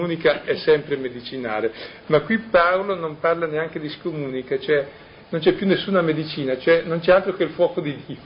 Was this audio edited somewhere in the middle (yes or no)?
no